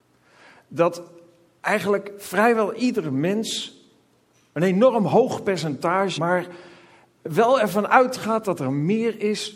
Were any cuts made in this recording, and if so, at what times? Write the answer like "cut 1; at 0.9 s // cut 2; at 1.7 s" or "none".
cut 1; at 6.2 s